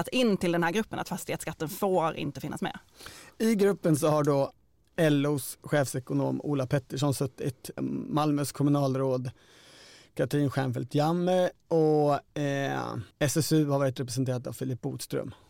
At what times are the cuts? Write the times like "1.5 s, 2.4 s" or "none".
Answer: 7.8 s, 13.1 s